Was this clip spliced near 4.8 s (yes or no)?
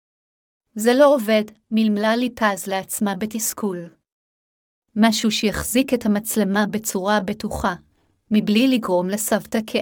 yes